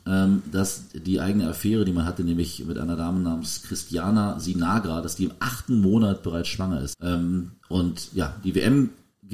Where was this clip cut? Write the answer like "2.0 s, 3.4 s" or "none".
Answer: 6.9 s